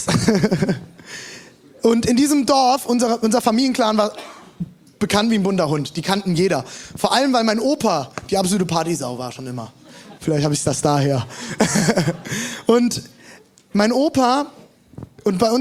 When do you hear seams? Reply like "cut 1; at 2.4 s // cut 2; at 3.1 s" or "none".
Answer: cut 1; at 10.2 s